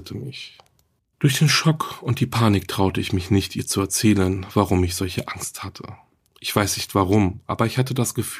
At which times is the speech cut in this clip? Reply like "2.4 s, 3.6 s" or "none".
1.0 s